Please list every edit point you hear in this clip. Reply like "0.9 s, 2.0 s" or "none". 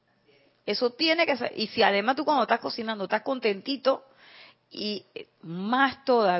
none